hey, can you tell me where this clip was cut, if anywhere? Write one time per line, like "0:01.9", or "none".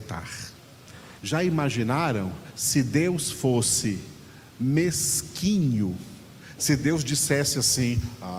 0:01.2
0:06.6